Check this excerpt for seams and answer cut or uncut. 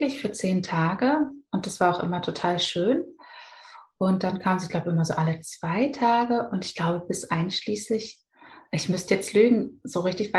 uncut